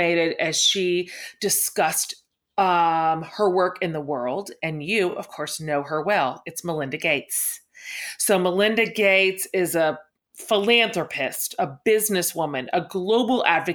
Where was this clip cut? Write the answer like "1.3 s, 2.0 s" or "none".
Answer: none